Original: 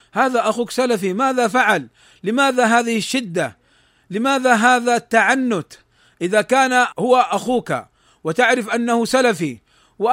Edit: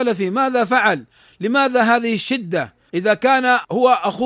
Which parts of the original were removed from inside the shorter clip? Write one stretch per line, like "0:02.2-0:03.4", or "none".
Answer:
0:03.7-0:06.2